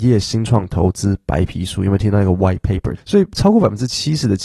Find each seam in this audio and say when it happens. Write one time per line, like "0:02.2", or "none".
0:03.0